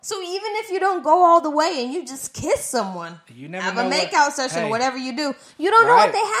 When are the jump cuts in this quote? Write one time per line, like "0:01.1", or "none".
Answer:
none